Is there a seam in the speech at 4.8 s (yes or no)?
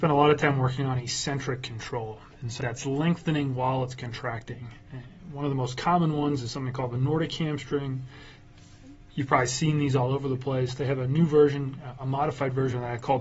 no